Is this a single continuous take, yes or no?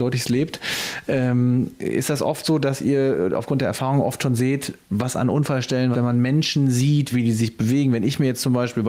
no